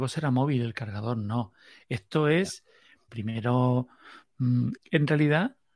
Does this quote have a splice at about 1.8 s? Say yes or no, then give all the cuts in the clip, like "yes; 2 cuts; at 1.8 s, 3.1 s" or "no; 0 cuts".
no; 2 cuts; at 3.1 s, 4.8 s